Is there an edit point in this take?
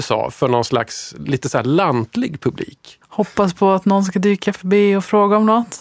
yes; 1 cut; at 3.0 s

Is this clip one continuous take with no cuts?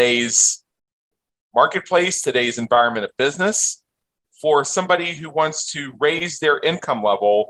yes; 0 cuts

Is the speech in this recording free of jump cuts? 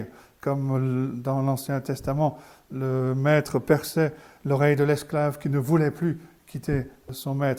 yes; 0 cuts

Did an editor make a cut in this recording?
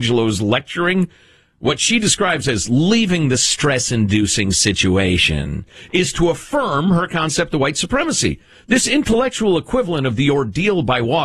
no; 0 cuts

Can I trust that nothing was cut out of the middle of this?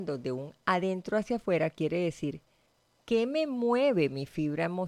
yes; 0 cuts

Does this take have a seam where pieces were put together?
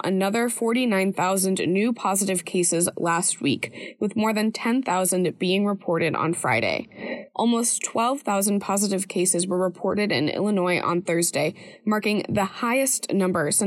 no; 0 cuts

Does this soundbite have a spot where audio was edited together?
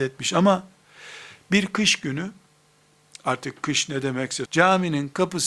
yes; 2 cuts; at 3.2 s, 4.5 s

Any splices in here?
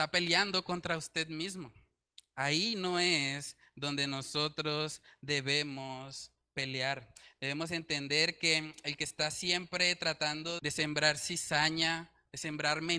yes; 1 cut; at 10.6 s

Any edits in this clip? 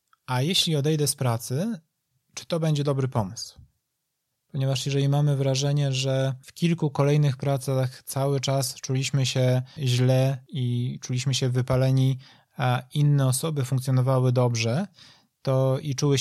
yes; 1 cut; at 4.3 s

